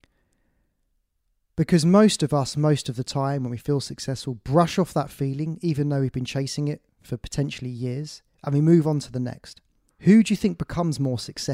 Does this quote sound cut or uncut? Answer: cut